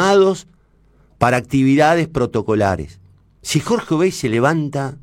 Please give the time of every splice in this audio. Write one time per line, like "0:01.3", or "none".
0:03.4